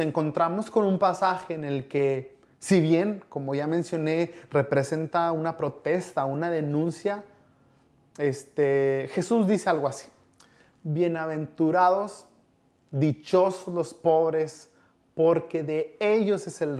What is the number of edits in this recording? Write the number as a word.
zero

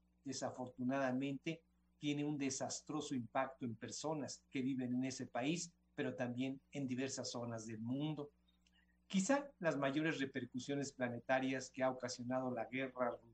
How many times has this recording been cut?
zero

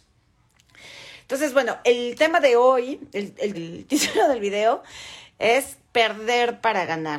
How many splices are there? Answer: two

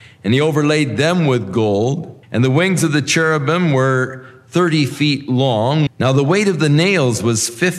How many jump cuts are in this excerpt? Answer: two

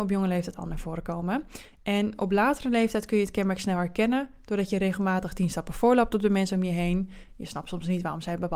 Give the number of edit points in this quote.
one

